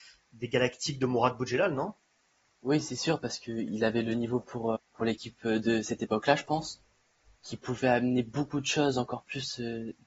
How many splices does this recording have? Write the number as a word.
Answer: one